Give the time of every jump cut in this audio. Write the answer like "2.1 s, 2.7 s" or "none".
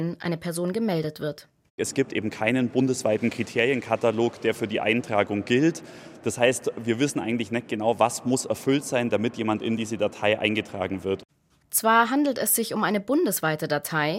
none